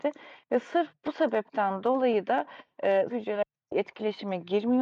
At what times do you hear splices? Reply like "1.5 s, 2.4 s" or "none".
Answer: 3.1 s